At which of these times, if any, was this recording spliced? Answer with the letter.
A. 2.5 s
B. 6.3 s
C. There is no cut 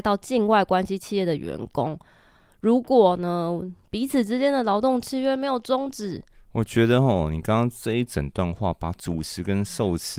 B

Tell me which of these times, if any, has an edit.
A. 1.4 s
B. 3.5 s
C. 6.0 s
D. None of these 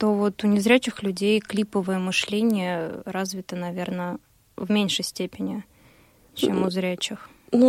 D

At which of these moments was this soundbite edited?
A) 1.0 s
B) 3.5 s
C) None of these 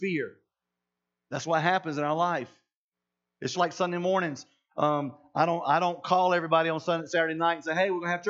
B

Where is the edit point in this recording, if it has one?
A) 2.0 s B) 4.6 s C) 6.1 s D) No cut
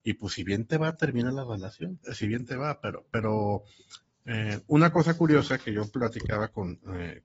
A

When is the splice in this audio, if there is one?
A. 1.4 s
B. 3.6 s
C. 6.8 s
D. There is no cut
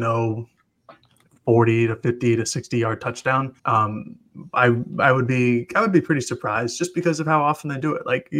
B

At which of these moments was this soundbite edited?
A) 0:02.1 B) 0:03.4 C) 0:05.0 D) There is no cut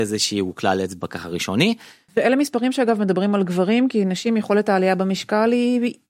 A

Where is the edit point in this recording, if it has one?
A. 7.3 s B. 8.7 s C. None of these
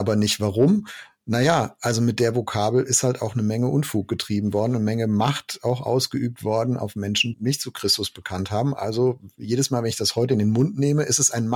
A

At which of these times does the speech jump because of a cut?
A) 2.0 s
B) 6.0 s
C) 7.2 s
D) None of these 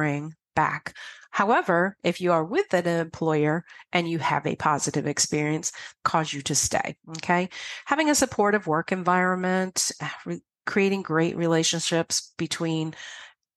B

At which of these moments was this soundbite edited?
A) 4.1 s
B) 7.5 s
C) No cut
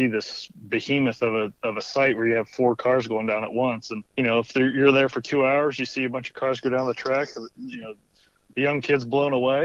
A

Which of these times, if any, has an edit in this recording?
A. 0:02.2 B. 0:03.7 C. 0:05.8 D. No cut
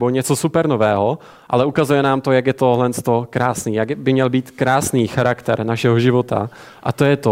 D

